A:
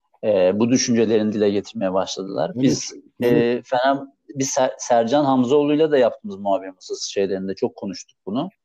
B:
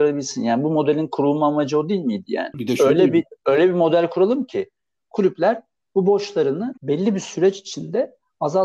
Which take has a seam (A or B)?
B